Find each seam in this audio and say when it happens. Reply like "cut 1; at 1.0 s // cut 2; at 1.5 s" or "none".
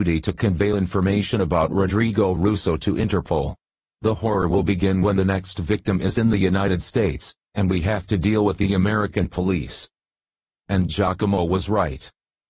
cut 1; at 3.9 s